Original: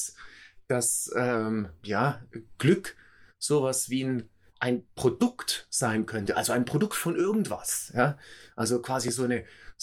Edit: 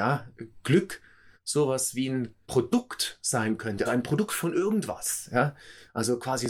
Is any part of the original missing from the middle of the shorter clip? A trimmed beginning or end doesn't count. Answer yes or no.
yes